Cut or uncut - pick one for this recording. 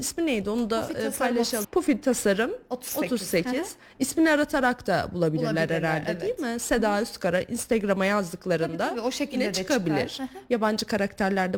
cut